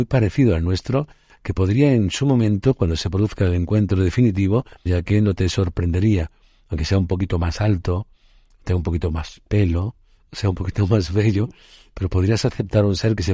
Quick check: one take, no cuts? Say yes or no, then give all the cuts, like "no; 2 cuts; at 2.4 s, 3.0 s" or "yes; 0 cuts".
no; 1 cut; at 4.9 s